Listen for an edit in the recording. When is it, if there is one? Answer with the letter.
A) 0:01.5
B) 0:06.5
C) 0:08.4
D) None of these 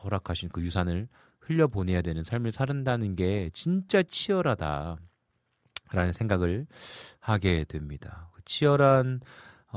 D